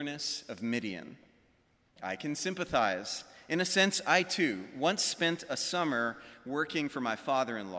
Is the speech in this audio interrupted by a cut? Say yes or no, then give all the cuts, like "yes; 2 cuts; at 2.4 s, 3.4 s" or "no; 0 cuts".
no; 0 cuts